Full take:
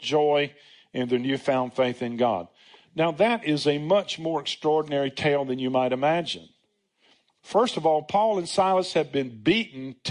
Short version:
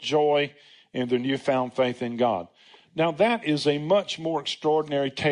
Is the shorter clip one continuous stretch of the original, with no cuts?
yes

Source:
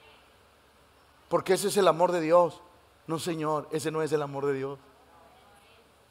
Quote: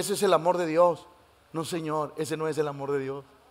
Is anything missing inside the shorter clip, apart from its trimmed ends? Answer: no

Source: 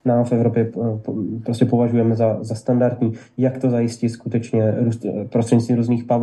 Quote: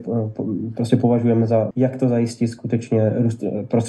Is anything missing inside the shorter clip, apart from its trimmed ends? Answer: yes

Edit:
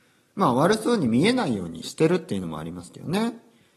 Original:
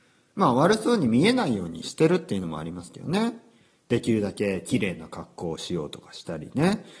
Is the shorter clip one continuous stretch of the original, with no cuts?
yes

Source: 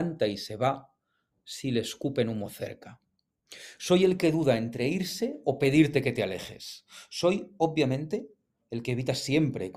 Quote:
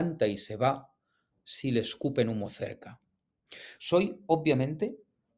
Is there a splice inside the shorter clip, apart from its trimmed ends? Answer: yes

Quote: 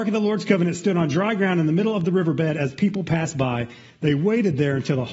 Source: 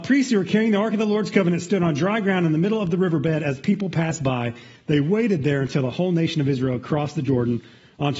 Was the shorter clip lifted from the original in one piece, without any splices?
yes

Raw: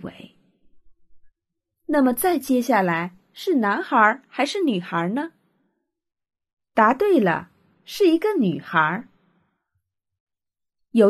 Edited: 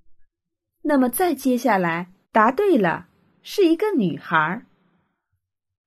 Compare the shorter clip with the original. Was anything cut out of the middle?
yes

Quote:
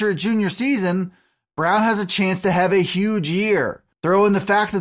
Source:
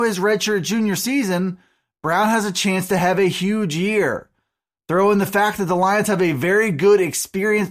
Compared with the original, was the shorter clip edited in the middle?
yes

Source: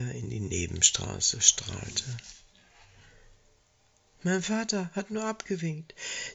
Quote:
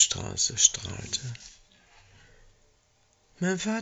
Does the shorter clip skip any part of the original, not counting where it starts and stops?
no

